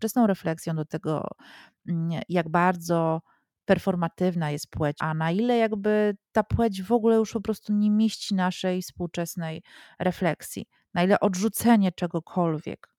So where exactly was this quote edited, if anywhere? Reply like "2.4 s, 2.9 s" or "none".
5.0 s